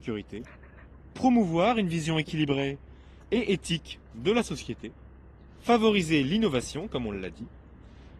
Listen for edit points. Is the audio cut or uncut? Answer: cut